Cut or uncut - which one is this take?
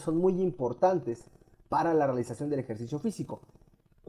uncut